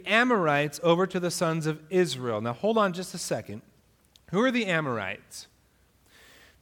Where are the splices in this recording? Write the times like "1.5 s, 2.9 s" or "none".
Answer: none

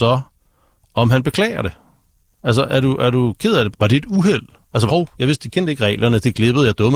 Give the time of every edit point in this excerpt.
3.7 s, 4.9 s

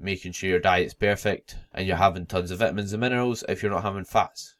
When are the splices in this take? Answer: 1.7 s

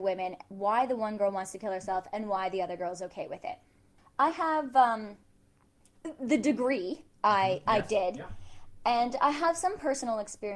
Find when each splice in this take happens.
4.0 s

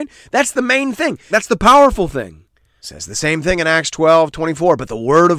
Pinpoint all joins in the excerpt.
1.3 s, 2.8 s

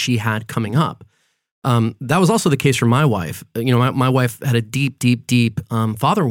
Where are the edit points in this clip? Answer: none

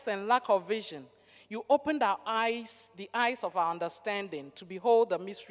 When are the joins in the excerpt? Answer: none

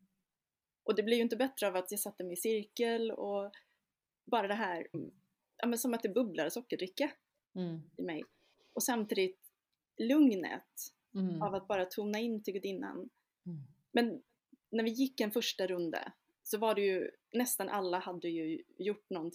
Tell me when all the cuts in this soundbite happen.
4.9 s

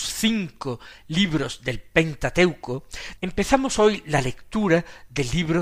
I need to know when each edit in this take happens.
3.2 s

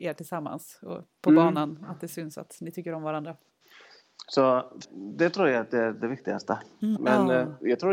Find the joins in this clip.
4.8 s, 7.0 s

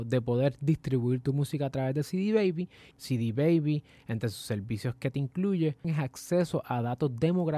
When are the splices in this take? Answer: 2.9 s, 5.8 s

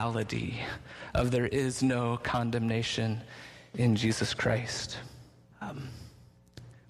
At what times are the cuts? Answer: 5.5 s

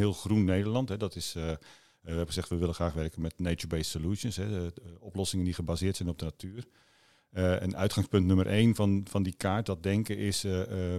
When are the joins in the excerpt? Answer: none

